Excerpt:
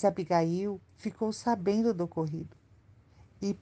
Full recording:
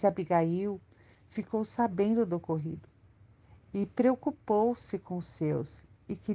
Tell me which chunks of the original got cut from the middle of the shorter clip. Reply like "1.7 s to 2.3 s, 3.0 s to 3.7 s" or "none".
0.9 s to 1.2 s